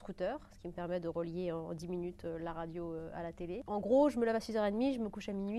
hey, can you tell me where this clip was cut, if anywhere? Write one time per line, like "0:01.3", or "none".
none